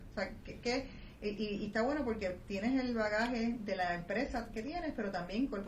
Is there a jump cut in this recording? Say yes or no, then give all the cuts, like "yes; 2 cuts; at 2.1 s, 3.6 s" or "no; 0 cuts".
no; 0 cuts